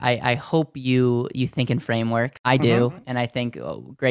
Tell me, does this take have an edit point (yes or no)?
no